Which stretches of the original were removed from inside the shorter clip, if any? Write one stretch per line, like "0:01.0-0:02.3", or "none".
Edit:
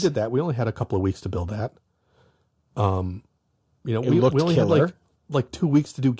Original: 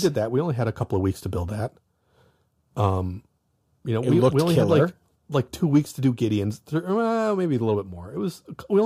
none